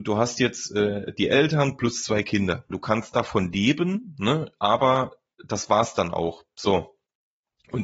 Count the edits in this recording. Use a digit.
1